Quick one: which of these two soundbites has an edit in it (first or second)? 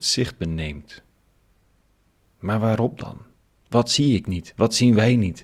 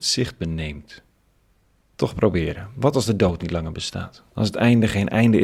second